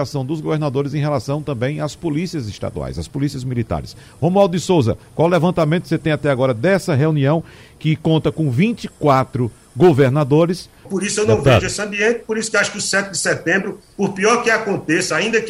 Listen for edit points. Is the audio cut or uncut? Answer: cut